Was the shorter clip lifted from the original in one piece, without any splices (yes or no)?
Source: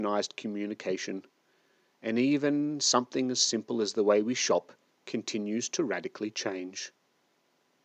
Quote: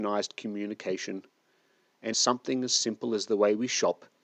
no